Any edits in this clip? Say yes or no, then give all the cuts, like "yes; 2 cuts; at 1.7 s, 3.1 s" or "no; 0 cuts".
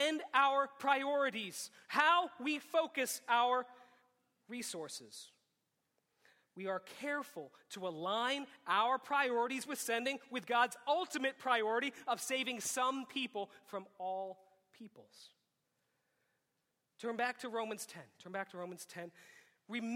no; 0 cuts